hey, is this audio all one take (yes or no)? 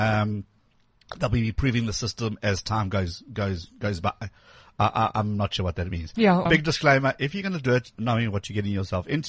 no